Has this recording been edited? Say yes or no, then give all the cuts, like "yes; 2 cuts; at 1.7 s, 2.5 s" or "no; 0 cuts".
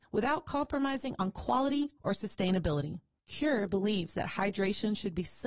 yes; 1 cut; at 2.0 s